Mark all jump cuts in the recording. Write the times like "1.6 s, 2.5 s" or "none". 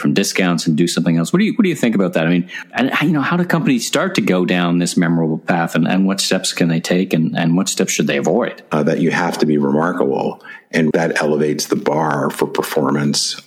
8.7 s, 10.9 s